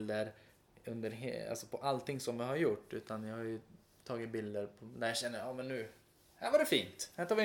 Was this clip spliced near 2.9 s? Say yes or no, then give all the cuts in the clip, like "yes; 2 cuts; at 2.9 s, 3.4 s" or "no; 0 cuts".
no; 0 cuts